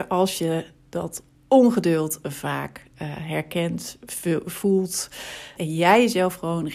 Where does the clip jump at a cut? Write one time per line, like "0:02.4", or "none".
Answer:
0:05.6

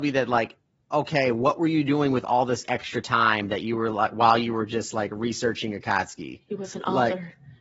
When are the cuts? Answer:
none

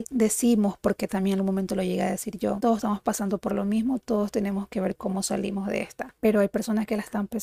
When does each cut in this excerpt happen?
0:02.6

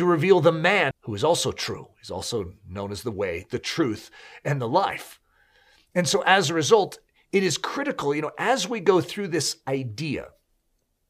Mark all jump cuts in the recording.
0:00.9

